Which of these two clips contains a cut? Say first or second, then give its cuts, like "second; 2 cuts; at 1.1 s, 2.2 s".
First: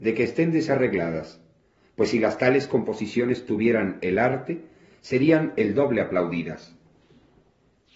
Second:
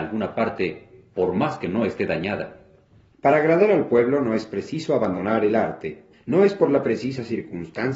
second; 2 cuts; at 3.1 s, 6.1 s